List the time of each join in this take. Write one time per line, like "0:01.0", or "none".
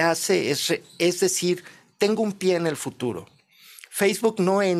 none